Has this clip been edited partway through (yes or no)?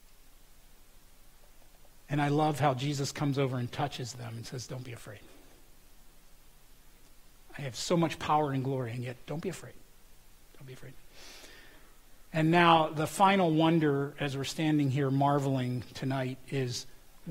no